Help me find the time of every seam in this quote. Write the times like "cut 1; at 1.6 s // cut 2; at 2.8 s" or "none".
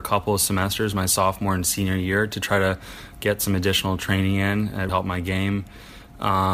cut 1; at 4.9 s